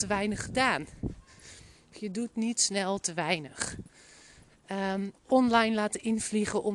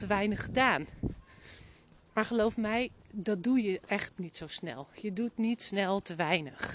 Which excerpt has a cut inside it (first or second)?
first